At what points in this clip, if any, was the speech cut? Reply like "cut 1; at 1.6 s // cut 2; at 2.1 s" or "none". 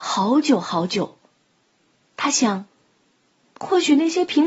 none